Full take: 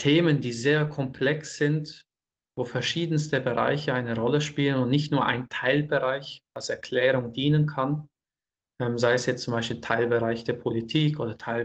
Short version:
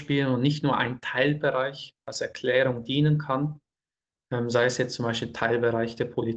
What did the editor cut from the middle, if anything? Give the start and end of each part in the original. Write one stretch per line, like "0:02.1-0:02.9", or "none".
none